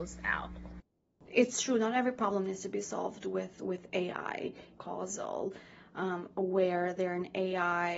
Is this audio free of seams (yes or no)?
no